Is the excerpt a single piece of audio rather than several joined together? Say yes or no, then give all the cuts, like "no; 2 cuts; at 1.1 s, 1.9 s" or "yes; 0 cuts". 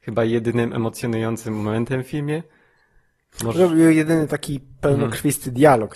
yes; 0 cuts